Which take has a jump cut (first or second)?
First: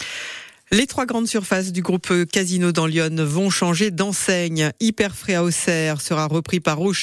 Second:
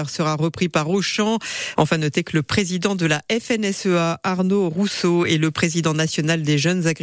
second